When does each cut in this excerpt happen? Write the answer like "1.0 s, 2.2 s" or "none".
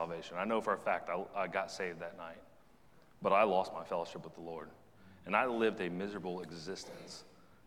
none